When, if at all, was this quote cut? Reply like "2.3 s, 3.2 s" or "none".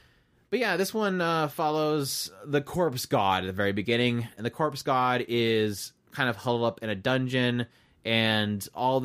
none